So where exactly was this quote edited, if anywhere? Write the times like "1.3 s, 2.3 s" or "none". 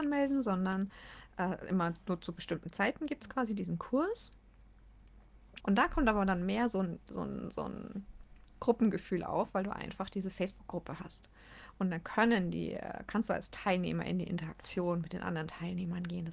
5.6 s